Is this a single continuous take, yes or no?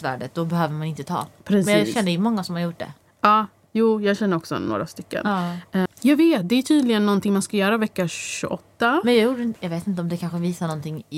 no